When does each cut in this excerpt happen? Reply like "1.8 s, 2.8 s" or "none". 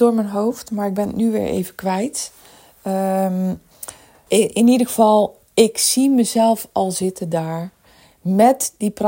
4.3 s

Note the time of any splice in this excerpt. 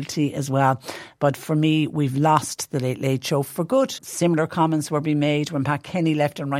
4.0 s

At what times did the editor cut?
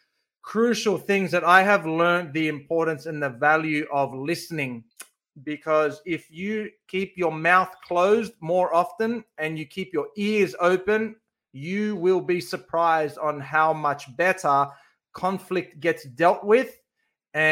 none

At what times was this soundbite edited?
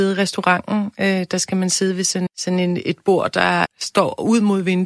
2.3 s, 3.6 s

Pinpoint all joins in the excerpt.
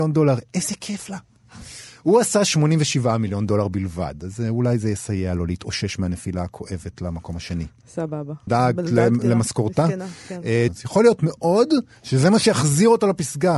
8.5 s, 10.7 s

